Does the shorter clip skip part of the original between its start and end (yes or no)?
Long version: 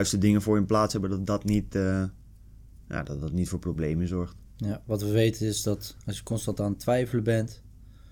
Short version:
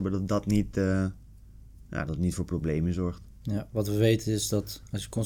yes